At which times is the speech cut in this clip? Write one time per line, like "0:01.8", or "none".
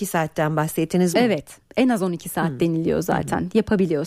0:01.1